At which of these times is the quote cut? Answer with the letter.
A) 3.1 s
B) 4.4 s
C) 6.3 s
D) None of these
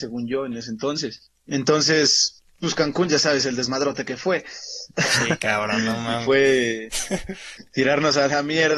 D